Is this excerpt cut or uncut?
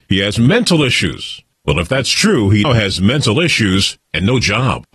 cut